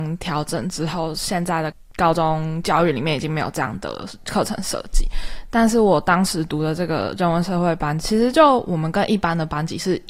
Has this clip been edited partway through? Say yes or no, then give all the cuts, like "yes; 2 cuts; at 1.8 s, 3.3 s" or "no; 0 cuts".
no; 0 cuts